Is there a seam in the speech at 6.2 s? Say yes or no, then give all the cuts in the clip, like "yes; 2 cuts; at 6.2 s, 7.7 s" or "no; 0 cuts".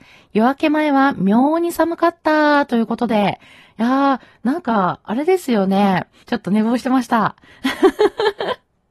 yes; 1 cut; at 6.2 s